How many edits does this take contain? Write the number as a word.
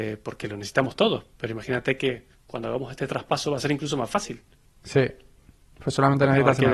zero